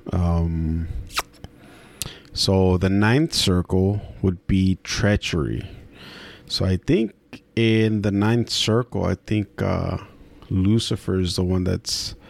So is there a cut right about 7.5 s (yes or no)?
yes